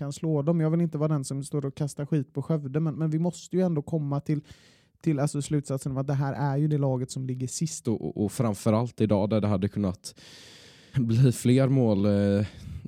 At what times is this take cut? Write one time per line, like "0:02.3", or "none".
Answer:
0:07.8
0:10.9